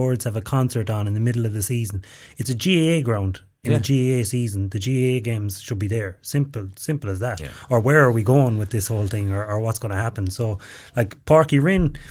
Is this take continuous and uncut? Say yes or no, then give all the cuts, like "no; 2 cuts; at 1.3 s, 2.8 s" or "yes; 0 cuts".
yes; 0 cuts